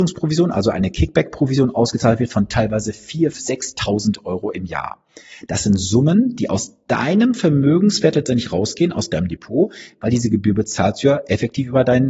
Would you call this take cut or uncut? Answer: cut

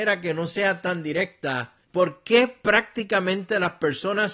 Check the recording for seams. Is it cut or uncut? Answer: cut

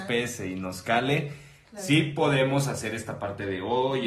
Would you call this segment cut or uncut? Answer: uncut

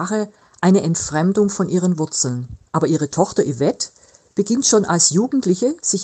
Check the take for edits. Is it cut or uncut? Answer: cut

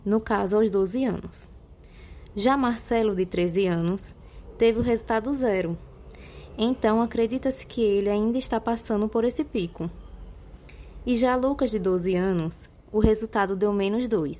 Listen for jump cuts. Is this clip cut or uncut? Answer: uncut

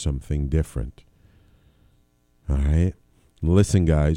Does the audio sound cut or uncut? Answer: uncut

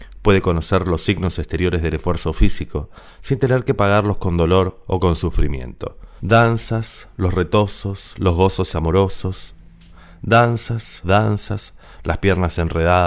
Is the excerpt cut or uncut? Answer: cut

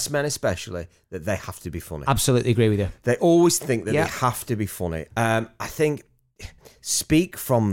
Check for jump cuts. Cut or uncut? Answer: cut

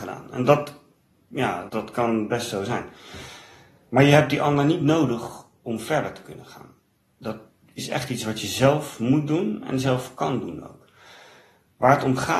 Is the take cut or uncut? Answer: cut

